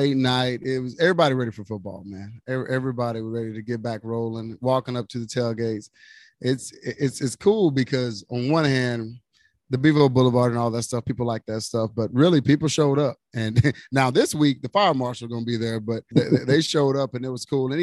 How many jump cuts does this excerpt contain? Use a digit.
1